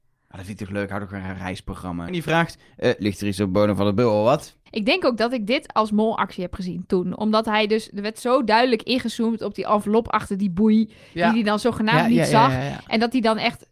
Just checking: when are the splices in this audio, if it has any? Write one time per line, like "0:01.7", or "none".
0:02.1
0:04.7